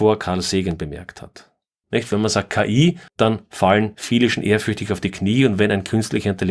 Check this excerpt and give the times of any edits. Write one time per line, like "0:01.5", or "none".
0:01.8
0:03.1